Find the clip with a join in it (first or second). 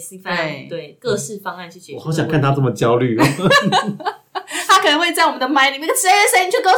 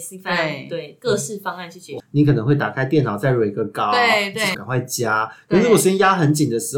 second